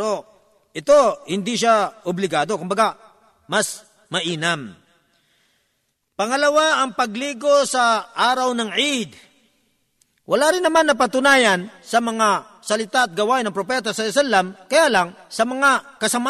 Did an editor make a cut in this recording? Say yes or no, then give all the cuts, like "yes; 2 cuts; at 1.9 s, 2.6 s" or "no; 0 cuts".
no; 0 cuts